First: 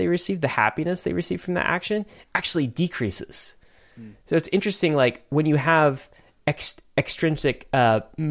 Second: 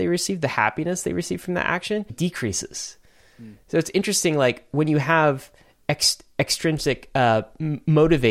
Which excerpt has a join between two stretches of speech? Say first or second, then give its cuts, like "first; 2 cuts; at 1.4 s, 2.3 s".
second; 1 cut; at 2.1 s